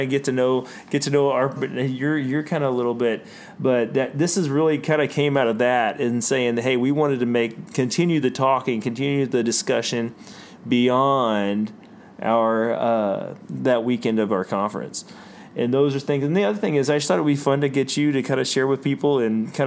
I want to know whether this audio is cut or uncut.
cut